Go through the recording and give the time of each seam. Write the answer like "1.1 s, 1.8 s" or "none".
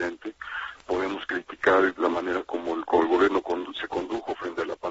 none